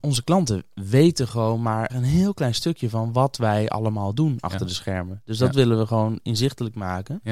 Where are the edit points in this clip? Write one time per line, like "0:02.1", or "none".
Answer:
0:01.9